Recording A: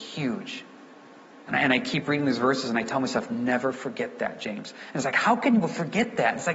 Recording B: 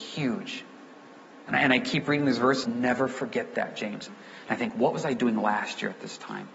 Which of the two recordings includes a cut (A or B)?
B